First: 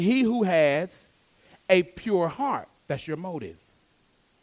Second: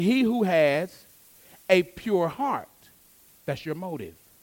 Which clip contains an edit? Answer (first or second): first